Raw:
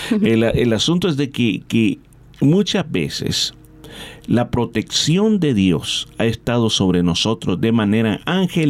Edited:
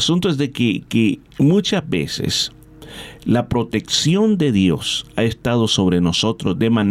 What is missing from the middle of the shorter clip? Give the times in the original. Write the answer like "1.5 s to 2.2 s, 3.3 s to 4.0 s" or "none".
2.1 s to 2.3 s